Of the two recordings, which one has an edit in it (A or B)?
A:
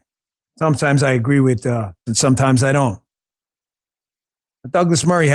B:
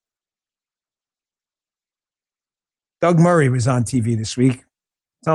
A